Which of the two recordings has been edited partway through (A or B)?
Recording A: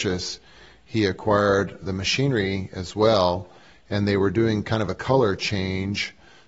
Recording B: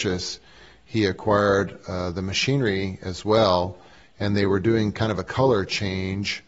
A